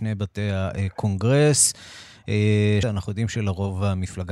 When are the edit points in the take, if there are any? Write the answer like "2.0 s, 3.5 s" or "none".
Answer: 2.8 s